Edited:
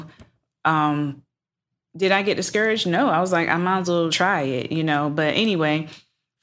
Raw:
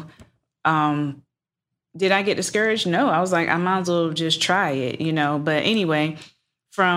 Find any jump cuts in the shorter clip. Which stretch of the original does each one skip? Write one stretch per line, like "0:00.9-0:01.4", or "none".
0:04.1-0:04.4